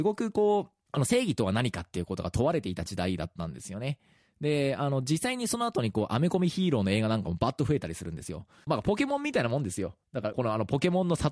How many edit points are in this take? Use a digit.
2